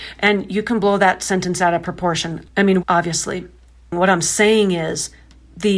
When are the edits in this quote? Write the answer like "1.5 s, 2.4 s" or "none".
2.8 s